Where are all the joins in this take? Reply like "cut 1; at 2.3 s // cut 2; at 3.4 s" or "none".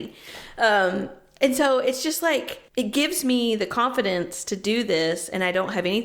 cut 1; at 2.7 s